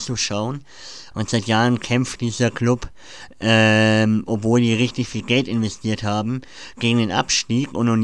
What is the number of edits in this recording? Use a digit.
1